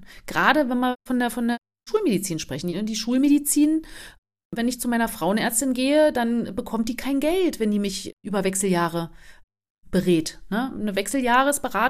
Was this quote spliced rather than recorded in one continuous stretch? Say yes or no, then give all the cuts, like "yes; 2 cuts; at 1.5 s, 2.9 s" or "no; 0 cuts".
no; 0 cuts